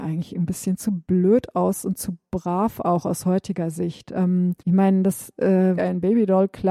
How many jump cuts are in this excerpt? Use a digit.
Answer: 2